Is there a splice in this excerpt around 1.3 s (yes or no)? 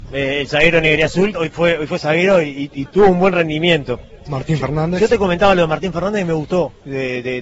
yes